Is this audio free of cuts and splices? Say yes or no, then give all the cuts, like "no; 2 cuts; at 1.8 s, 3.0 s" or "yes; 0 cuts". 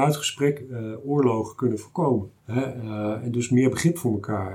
no; 1 cut; at 2.4 s